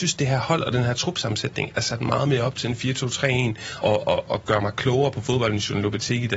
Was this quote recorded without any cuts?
no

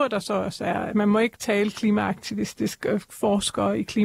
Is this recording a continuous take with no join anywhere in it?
yes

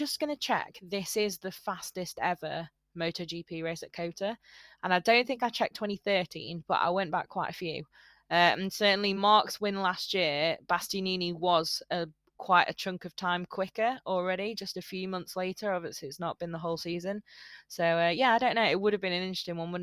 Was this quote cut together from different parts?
no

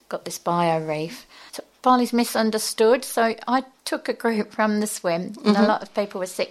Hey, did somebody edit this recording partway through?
yes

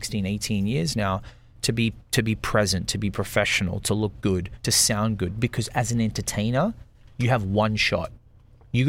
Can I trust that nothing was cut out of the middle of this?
yes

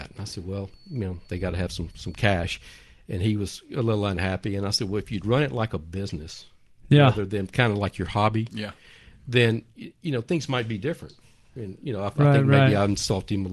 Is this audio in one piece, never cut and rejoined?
yes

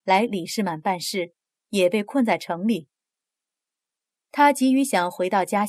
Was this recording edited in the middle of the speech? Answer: no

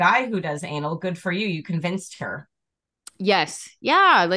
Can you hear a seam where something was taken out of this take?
no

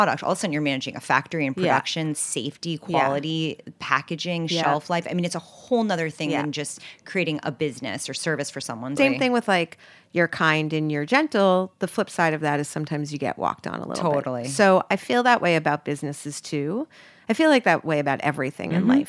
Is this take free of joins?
no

